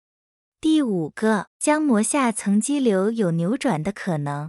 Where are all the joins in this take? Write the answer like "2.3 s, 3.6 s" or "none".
1.5 s

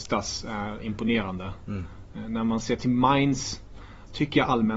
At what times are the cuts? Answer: none

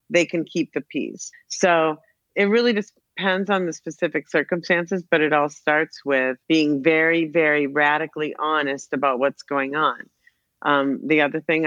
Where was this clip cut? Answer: 1.3 s, 6.4 s

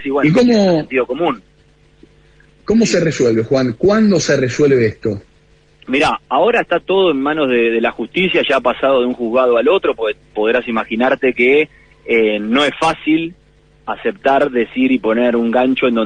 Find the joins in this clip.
none

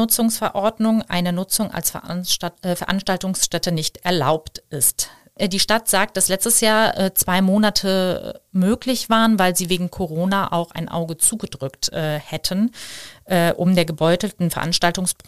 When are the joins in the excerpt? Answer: none

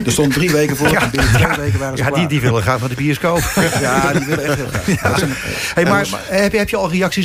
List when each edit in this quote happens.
none

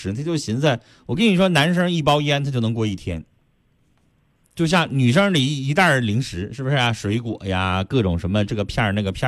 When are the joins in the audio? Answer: none

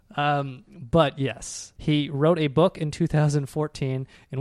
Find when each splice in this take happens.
1.8 s

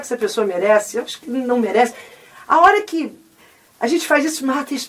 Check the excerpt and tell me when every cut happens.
none

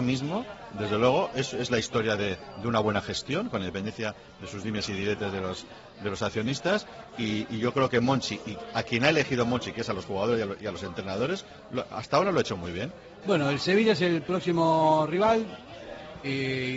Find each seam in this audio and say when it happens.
13.2 s

